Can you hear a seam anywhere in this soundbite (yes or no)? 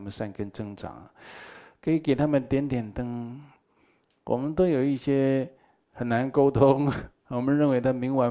no